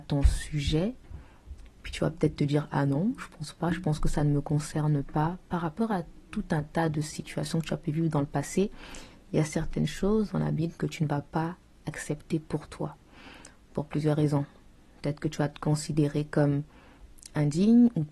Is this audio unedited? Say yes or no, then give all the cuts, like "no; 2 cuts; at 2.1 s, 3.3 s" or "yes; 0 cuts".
yes; 0 cuts